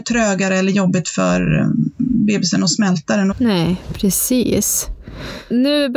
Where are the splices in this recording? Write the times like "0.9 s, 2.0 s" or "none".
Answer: 3.3 s